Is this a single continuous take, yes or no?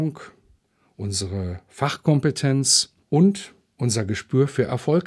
no